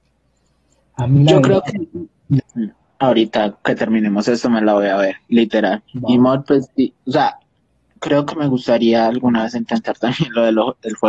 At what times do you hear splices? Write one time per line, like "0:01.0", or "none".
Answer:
0:02.4
0:05.9